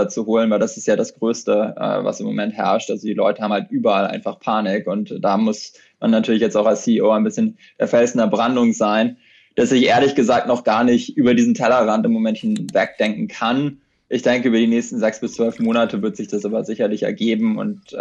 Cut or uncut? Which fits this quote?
uncut